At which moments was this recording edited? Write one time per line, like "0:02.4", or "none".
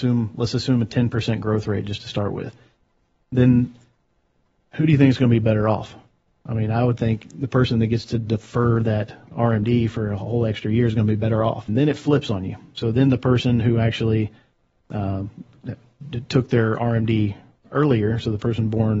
0:11.7